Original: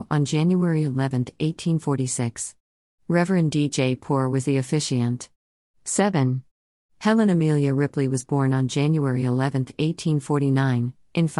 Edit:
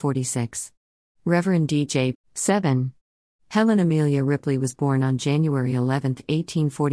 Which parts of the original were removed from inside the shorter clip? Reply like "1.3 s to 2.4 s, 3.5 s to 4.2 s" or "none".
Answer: 4.0 s to 5.6 s